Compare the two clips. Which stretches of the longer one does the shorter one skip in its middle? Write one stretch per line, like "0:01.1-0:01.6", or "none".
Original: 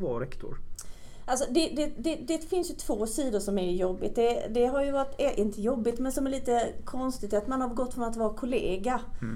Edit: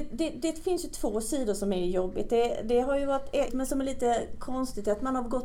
0:05.3-0:05.9